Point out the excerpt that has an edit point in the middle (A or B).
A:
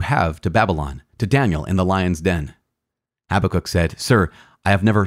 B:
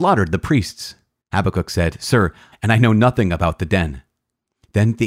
B